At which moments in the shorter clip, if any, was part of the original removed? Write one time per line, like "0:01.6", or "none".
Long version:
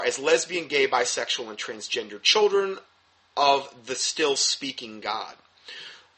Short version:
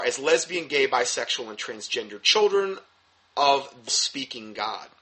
0:03.9